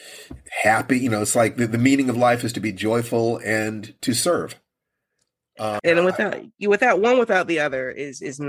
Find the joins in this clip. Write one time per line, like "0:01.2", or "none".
0:05.8

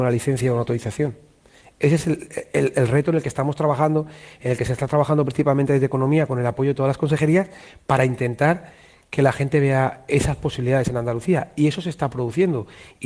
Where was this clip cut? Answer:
none

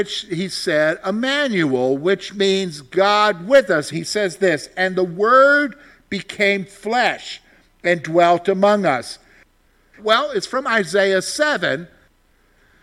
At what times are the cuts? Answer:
0:03.9
0:10.0

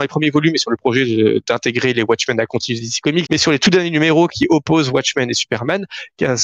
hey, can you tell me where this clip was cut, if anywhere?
0:03.2

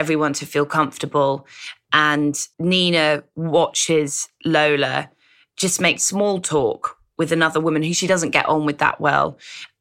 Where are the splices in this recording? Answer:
0:02.5

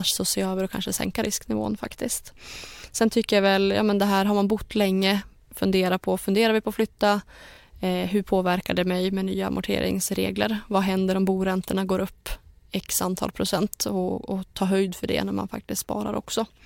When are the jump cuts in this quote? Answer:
none

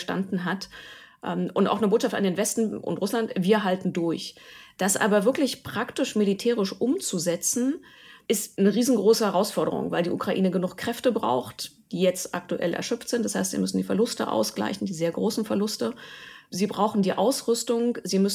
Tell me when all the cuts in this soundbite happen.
none

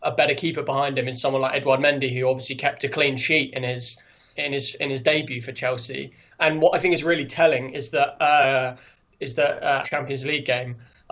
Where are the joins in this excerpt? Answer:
0:04.4
0:06.3
0:09.8

